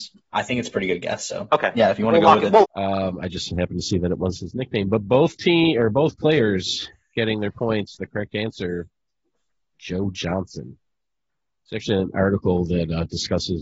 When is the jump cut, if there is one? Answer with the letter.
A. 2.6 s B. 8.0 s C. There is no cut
A